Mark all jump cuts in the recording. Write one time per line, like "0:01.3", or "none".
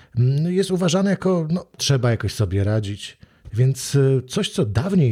0:01.8
0:03.5